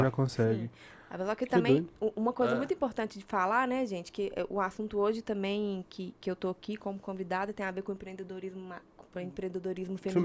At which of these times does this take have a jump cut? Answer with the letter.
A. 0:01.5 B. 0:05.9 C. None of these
C